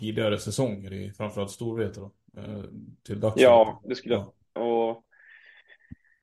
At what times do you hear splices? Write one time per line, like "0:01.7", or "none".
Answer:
0:04.6